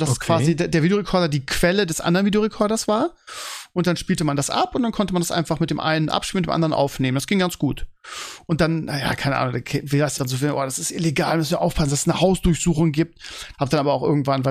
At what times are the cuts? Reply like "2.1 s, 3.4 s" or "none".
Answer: 10.2 s, 13.5 s